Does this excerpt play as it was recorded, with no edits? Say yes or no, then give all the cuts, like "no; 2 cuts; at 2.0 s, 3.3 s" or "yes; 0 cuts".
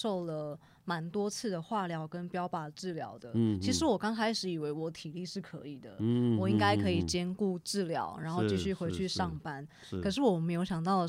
yes; 0 cuts